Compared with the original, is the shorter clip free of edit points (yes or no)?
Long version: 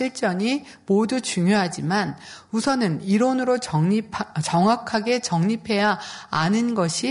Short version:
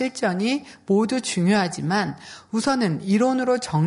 yes